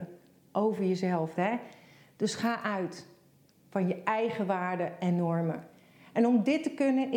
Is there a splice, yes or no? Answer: yes